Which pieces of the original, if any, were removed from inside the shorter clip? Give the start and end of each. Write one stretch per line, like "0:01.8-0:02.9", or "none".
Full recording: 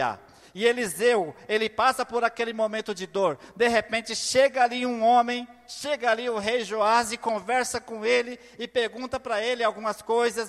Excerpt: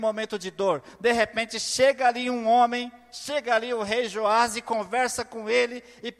none